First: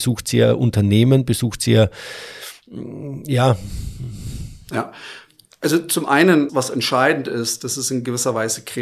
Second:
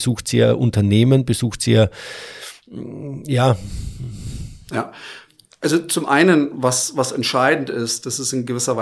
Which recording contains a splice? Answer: first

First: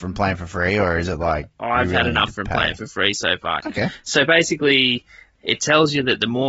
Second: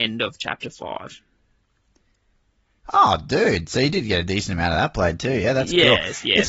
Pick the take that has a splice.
first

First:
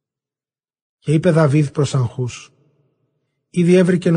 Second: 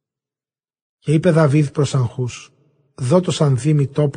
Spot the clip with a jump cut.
second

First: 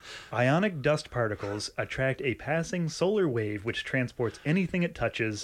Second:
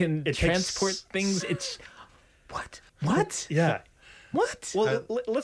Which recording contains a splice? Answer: second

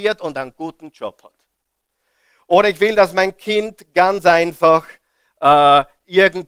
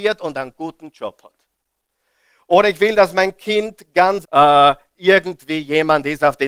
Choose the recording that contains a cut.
second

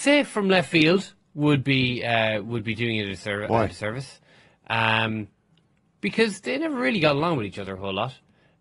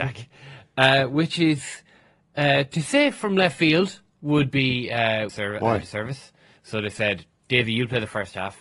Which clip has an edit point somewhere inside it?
second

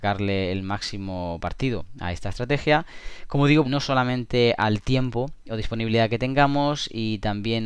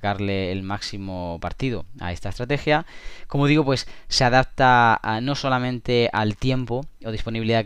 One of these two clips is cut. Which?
first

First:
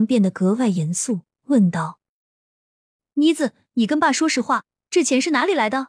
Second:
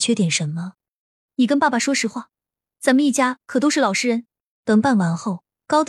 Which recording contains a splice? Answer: second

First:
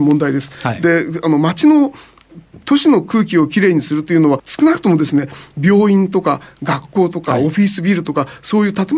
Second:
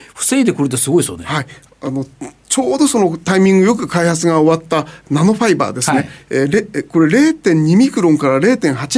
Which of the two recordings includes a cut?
first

